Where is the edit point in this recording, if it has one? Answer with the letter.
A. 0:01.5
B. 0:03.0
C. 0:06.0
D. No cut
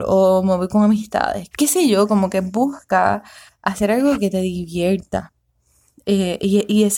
A